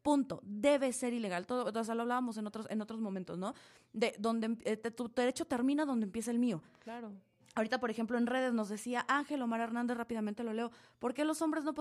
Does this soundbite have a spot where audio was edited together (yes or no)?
no